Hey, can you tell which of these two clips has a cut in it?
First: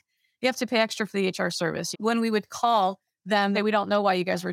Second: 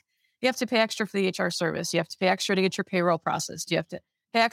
first; 2 cuts; at 1.9 s, 3.5 s

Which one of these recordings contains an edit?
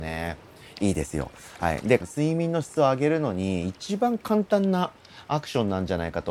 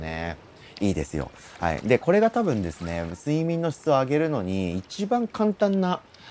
first; 1 cut; at 2.0 s

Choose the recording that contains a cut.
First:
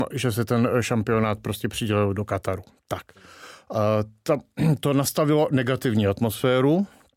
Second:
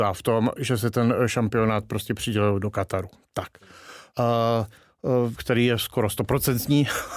second; 2 cuts; at 4.1 s, 5.3 s

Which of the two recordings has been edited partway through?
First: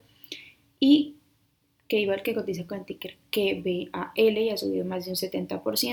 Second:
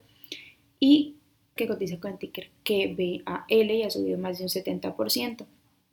second; 1 cut; at 1.6 s

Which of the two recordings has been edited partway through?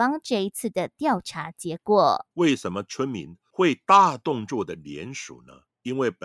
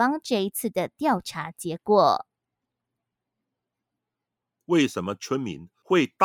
first; 1 cut; at 2.3 s

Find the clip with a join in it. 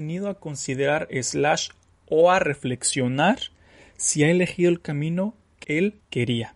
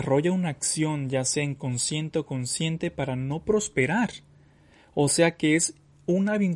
first; 1 cut; at 5.6 s

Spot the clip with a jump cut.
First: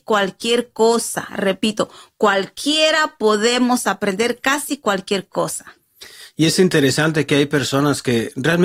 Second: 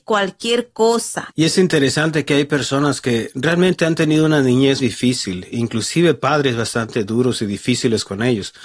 second; 2 cuts; at 1.3 s, 4.8 s

